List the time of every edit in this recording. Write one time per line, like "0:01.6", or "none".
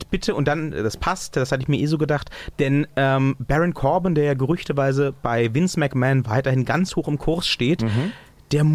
0:02.5